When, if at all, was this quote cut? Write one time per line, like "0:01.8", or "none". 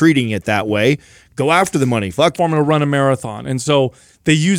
0:02.4